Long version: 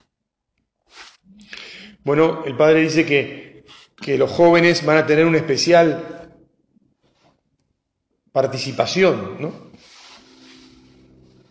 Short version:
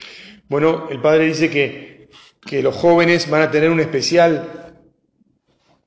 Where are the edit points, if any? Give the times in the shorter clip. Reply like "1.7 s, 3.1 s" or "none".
none